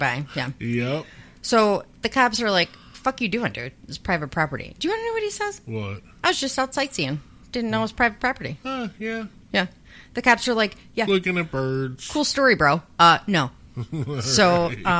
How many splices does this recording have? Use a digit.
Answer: 0